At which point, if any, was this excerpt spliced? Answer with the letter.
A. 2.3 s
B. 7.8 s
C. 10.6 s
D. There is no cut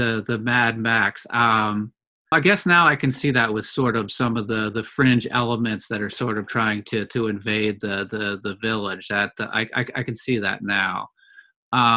A